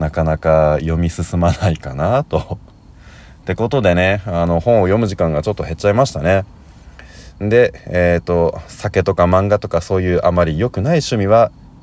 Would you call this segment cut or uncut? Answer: uncut